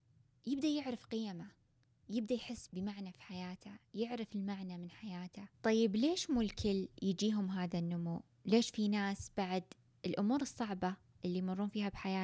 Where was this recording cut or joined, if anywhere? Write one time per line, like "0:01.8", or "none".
0:02.7
0:05.5